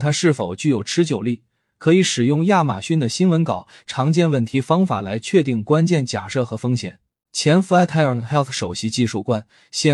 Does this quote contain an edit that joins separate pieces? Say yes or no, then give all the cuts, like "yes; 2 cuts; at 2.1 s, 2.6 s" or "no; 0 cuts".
yes; 1 cut; at 7.2 s